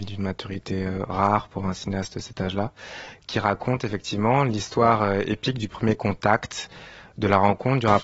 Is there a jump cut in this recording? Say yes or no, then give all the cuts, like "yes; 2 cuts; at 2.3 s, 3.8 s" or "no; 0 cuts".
no; 0 cuts